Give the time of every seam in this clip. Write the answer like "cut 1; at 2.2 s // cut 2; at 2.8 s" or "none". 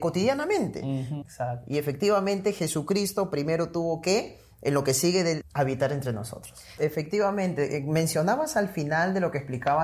cut 1; at 1.2 s // cut 2; at 5.4 s // cut 3; at 6.8 s